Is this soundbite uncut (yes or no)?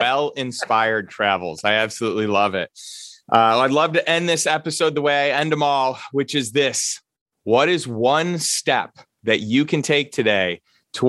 yes